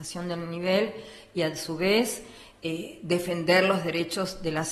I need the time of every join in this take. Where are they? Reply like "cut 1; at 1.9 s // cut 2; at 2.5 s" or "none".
none